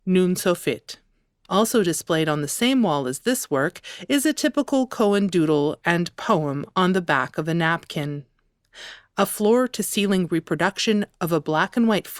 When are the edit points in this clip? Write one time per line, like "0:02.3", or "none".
0:01.4